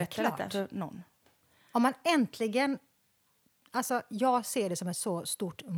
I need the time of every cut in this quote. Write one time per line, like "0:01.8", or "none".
none